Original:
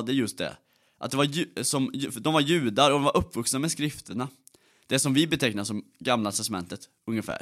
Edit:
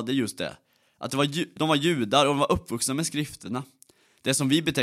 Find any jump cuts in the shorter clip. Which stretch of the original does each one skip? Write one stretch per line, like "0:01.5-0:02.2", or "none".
0:01.6-0:02.2